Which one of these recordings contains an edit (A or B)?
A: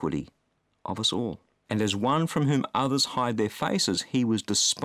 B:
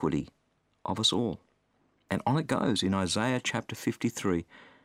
A